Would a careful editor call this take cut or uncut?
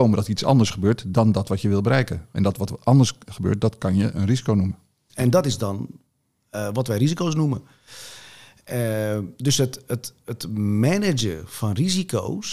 cut